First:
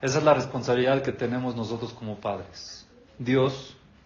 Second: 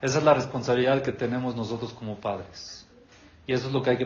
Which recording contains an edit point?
first; 1 cut; at 3.1 s

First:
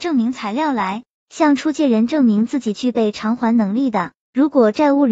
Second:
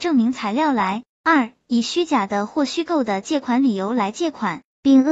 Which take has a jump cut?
second; 1 cut; at 1.1 s

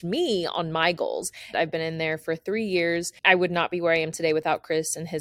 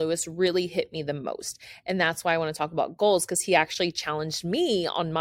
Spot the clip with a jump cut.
first; 2 cuts; at 1.5 s, 3.2 s

